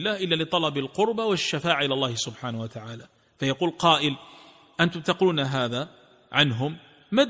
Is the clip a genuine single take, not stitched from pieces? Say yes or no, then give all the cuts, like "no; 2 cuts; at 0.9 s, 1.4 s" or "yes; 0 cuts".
yes; 0 cuts